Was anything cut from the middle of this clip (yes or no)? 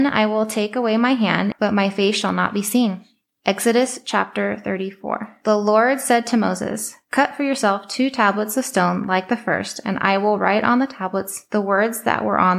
yes